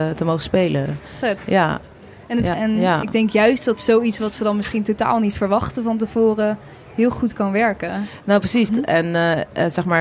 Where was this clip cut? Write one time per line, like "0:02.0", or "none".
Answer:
0:02.5
0:08.7